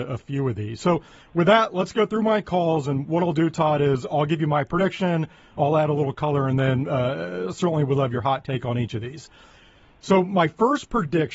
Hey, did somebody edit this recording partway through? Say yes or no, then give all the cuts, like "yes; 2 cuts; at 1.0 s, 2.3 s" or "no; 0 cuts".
no; 0 cuts